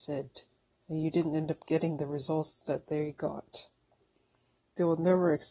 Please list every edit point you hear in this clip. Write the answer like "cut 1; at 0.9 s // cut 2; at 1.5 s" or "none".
cut 1; at 4.6 s